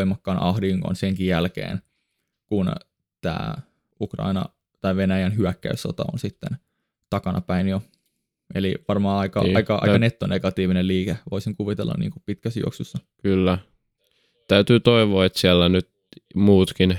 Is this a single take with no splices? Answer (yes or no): yes